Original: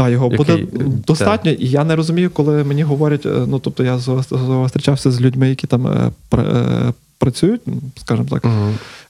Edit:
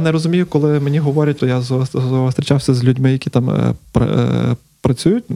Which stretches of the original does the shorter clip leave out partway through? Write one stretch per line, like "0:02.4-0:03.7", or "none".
0:03.2-0:03.8